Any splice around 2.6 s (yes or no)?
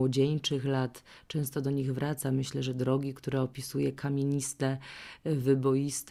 no